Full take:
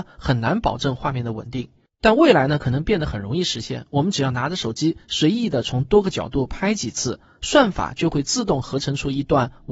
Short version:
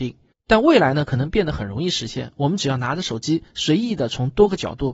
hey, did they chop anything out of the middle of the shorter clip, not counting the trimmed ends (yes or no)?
no